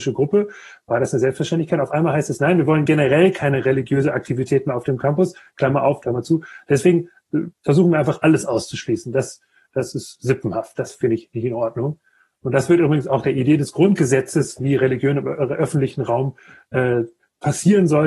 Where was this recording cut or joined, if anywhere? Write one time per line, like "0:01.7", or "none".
0:06.0